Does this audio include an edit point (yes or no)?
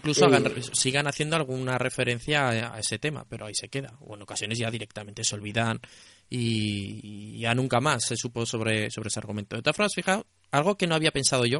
no